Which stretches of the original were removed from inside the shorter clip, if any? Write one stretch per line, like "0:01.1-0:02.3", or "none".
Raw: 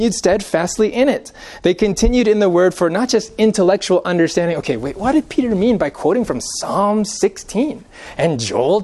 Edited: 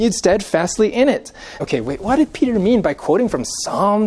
0:01.6-0:04.6